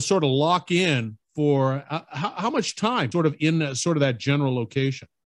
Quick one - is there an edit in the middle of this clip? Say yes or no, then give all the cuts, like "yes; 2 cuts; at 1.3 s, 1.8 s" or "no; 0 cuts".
yes; 1 cut; at 3.1 s